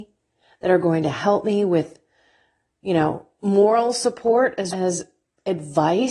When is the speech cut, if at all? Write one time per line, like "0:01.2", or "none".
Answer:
0:04.7